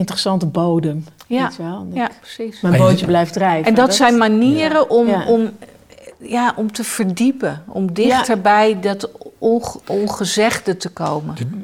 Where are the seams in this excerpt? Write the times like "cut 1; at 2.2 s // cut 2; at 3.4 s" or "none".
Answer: cut 1; at 2.6 s